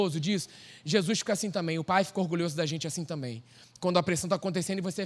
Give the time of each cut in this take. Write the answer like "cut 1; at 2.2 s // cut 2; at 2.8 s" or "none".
none